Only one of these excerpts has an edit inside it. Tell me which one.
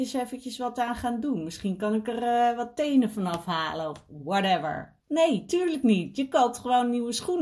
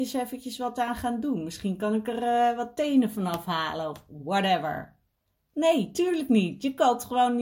first; 1 cut; at 5.0 s

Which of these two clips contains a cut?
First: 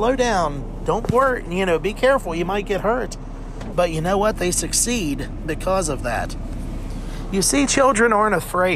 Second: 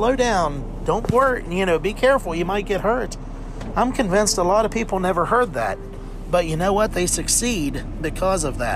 first; 1 cut; at 3.7 s

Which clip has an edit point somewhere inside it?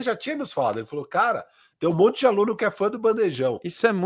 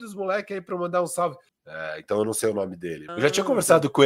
second; 2 cuts; at 1.5 s, 3.1 s

